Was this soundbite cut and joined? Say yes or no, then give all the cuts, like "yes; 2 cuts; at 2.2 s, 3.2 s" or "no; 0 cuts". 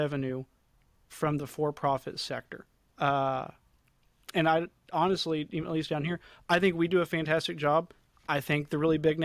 yes; 1 cut; at 2.9 s